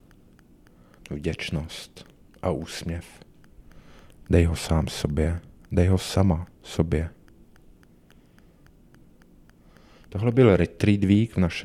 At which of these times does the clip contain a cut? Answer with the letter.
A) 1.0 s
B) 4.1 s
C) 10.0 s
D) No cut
A